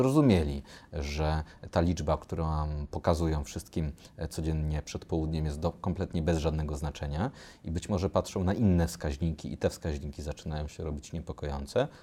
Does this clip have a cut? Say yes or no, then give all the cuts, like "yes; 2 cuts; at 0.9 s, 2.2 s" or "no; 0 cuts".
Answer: no; 0 cuts